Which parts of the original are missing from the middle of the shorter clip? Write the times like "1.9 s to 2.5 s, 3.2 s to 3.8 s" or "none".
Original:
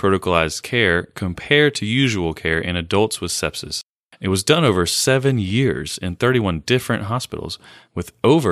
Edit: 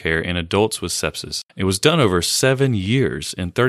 3.9 s to 4.1 s